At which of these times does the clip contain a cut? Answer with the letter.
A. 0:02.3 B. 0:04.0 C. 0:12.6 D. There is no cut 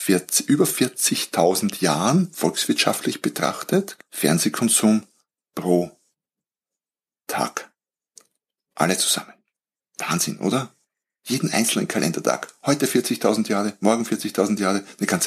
B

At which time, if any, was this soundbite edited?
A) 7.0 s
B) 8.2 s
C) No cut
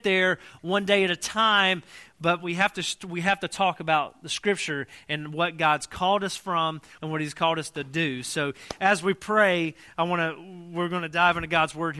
A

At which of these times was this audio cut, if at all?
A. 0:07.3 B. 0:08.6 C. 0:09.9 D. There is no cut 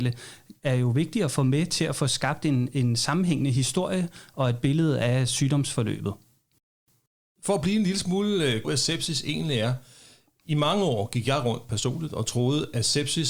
B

